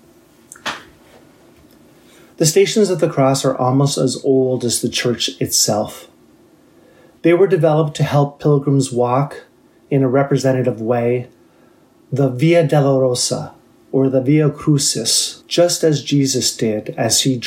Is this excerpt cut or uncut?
cut